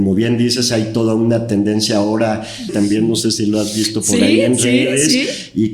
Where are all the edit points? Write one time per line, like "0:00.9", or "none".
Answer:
0:02.7